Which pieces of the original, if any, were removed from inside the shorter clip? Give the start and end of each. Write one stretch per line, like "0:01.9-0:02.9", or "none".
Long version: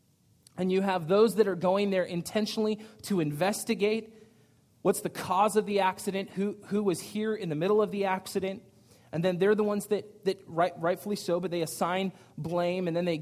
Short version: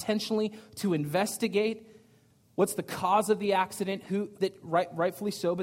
0:06.6-0:10.2